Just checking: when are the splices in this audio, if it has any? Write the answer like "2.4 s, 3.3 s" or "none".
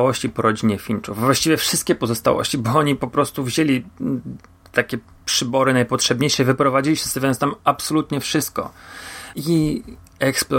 9.3 s